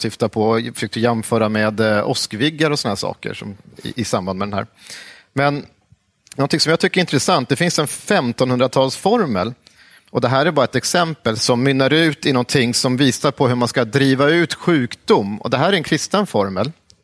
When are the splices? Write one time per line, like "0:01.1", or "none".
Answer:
none